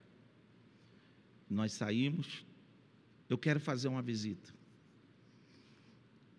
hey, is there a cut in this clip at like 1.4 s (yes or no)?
no